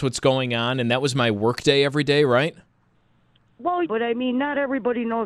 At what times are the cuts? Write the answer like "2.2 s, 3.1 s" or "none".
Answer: 3.8 s